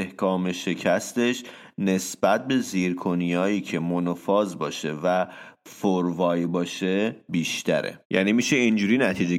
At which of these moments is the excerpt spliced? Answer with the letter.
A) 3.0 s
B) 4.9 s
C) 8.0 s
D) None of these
C